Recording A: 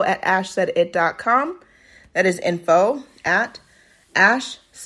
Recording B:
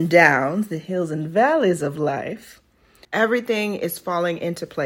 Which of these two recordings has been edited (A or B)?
B